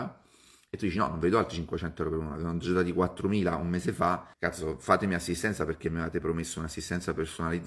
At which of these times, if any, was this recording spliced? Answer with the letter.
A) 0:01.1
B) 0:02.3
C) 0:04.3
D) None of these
C